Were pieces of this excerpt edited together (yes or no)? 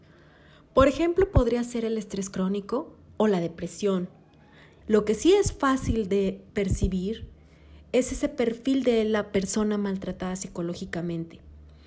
yes